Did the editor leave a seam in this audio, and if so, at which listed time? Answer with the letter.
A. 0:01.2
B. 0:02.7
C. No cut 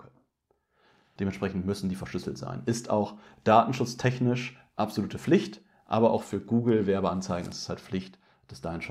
A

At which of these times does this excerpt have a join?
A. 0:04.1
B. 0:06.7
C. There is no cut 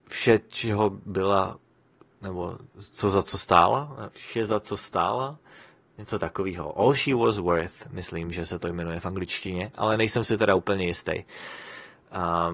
A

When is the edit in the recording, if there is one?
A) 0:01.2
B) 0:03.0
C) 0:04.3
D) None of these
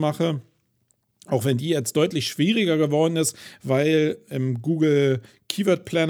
C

